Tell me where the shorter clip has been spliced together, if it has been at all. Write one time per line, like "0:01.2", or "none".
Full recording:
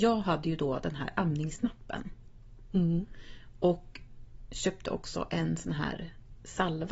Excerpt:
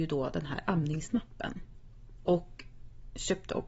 0:02.2